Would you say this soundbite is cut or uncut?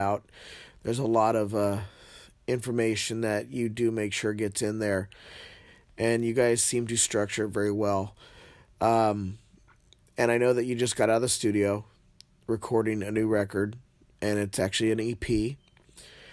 uncut